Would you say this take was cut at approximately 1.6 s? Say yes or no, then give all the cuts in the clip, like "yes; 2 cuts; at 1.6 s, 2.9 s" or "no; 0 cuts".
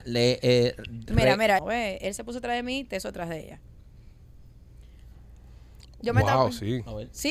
yes; 1 cut; at 1.6 s